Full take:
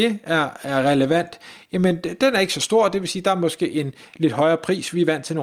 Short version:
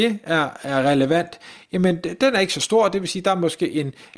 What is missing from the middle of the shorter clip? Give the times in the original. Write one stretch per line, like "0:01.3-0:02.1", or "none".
none